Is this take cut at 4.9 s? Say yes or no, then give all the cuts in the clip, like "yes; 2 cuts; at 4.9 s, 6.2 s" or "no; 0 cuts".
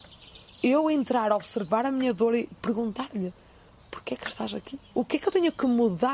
yes; 1 cut; at 4.9 s